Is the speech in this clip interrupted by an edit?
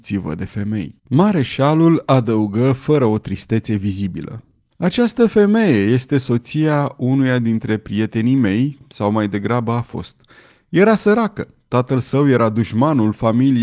yes; 2 cuts; at 1.0 s, 4.7 s

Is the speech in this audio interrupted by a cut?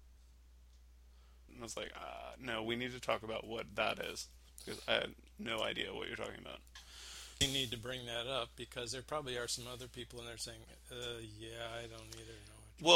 yes; 2 cuts; at 1.5 s, 7.4 s

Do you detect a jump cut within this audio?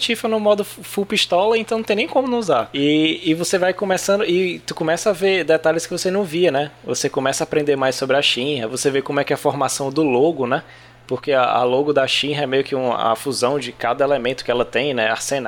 no; 0 cuts

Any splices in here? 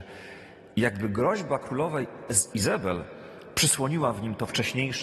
yes; 1 cut; at 2.5 s

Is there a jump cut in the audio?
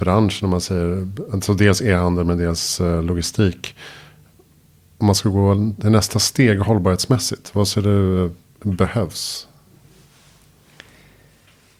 no; 0 cuts

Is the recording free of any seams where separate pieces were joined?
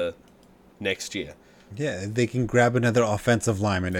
no; 1 cut; at 1.7 s

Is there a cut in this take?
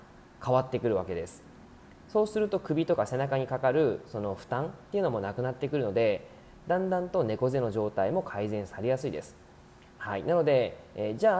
no; 0 cuts

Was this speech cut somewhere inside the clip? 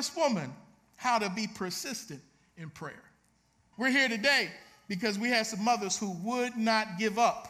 yes; 1 cut; at 3.7 s

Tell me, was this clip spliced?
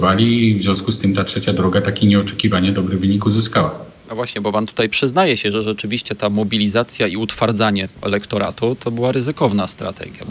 no; 0 cuts

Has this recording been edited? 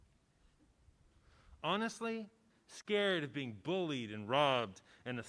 yes; 1 cut; at 2.5 s

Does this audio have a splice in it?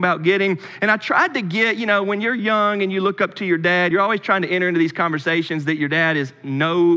no; 0 cuts

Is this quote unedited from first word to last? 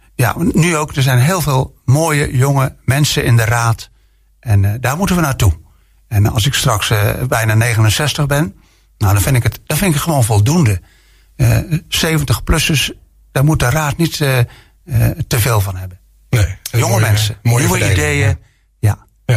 yes; 0 cuts

